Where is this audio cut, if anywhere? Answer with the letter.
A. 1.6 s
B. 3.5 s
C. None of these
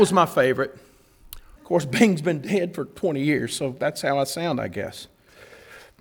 A